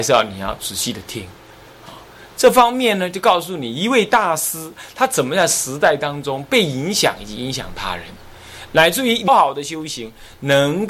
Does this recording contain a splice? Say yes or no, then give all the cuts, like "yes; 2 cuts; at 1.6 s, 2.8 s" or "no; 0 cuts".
yes; 1 cut; at 9.3 s